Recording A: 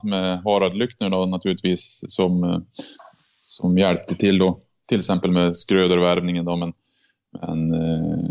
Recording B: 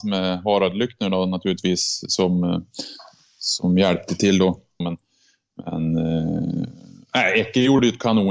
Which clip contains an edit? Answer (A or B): B